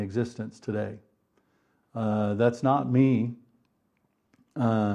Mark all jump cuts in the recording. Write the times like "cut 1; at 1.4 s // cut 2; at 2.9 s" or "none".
cut 1; at 1.8 s